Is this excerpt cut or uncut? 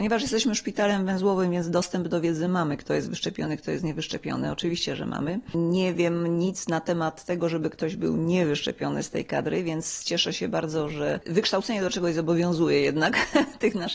uncut